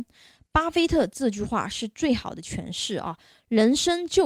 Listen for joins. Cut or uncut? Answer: uncut